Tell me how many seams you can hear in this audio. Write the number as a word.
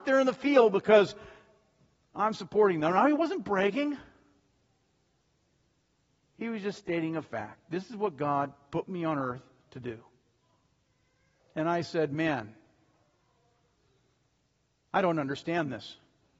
one